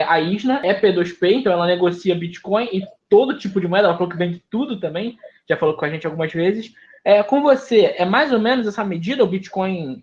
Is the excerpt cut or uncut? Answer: uncut